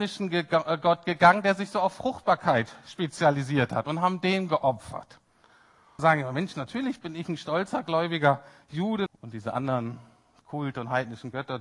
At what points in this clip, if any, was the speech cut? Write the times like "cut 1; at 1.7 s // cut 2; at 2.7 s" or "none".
cut 1; at 6.0 s // cut 2; at 9.1 s